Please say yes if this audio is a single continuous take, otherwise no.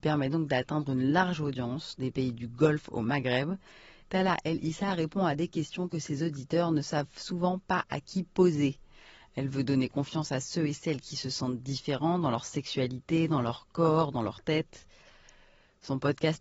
no